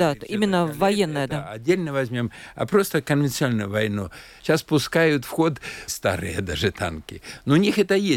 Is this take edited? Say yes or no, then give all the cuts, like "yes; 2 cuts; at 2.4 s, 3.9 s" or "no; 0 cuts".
yes; 2 cuts; at 4.4 s, 5.9 s